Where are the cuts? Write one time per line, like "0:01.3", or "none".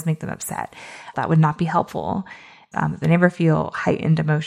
0:01.1
0:02.7

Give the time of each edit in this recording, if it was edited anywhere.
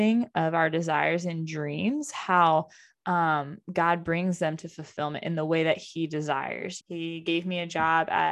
0:06.8

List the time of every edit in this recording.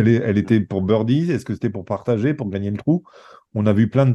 none

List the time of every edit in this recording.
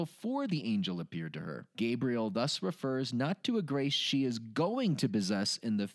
0:01.7

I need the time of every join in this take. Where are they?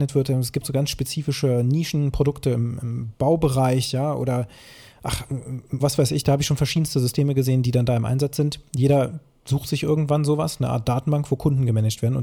0:05.8

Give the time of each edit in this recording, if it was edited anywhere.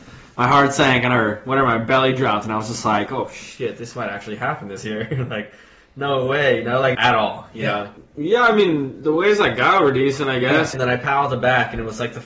0:06.9
0:08.0
0:10.7

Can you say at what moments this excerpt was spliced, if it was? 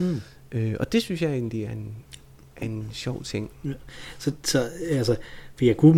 none

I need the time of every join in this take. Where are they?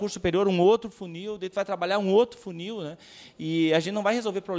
none

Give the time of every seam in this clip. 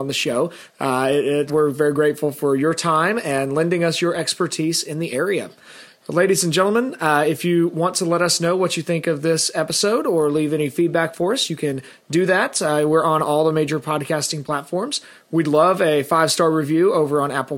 0:01.5

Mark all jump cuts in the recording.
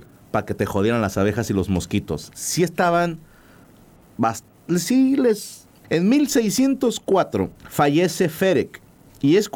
0:05.8
0:07.6

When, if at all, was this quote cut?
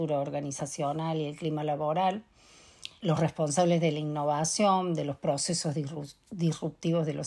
0:03.0

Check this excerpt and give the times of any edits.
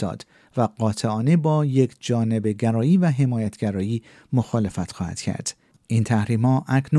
0:05.7

